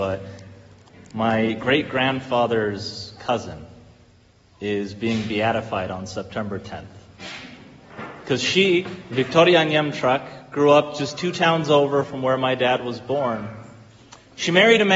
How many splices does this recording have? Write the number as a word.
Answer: zero